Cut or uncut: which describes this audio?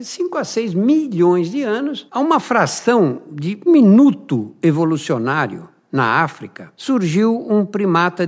cut